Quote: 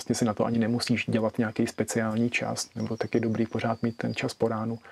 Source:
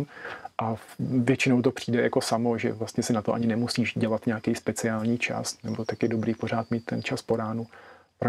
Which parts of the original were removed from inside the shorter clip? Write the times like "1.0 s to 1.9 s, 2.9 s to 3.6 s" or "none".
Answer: none